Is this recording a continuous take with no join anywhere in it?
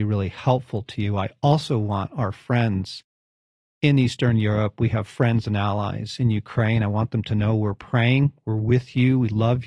yes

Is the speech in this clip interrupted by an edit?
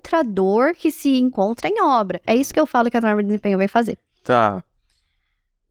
yes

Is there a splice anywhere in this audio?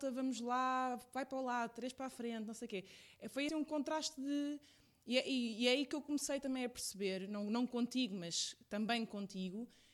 yes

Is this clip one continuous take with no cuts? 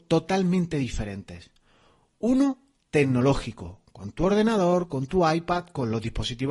yes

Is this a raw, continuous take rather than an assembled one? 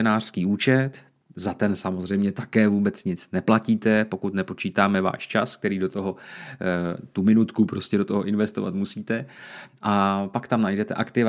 yes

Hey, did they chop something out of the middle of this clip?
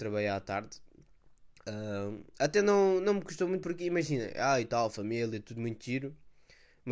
no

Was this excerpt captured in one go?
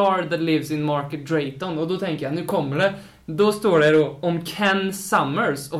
yes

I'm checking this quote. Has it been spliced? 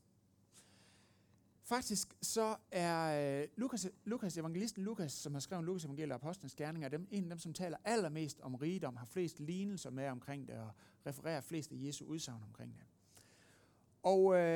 no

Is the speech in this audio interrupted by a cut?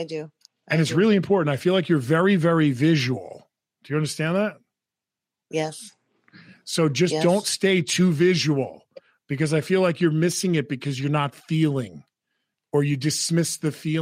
no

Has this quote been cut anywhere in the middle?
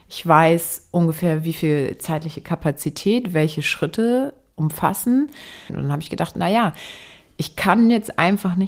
yes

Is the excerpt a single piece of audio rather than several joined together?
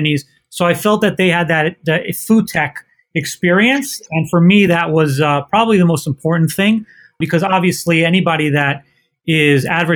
yes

